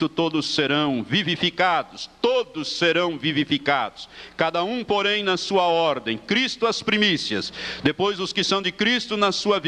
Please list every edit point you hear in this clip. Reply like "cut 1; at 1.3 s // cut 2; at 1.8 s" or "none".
none